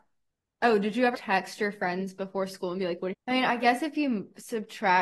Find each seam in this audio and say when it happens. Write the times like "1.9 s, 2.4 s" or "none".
1.1 s, 3.1 s